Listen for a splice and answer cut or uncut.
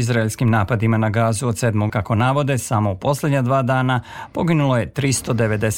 cut